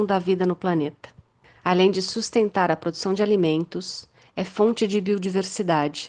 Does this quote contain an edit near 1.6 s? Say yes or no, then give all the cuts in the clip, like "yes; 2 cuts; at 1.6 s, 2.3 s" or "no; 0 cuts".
no; 0 cuts